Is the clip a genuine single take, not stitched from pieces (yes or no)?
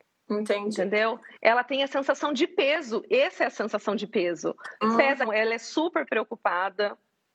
no